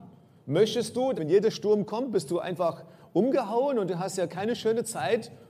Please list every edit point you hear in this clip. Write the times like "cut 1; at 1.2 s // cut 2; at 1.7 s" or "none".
cut 1; at 1.2 s